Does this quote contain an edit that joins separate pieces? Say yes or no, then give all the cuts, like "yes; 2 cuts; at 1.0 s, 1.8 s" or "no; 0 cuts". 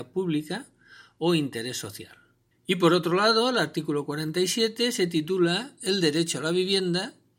yes; 1 cut; at 2.5 s